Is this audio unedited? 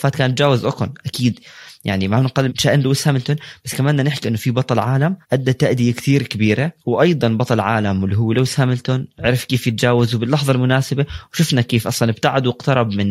no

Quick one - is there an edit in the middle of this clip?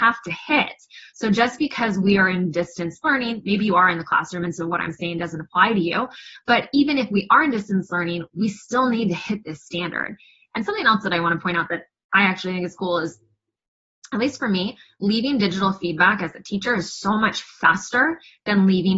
no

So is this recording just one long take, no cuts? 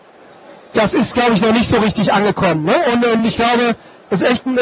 yes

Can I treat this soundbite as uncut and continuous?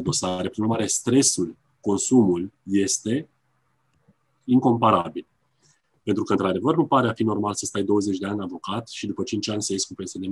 no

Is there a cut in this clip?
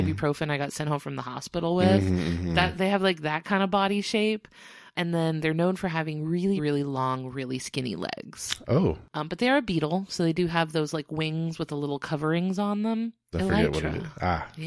yes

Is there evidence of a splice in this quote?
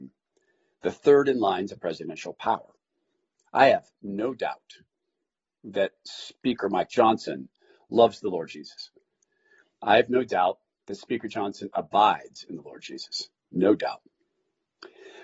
no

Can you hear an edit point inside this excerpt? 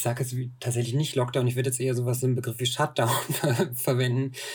no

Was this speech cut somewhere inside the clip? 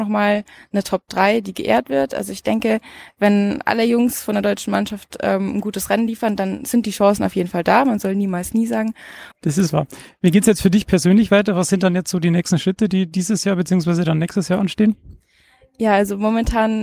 yes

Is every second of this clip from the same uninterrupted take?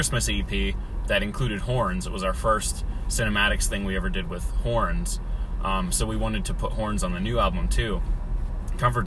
yes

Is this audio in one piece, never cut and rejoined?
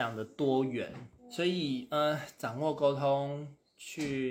no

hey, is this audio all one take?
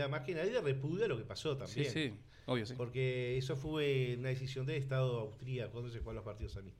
yes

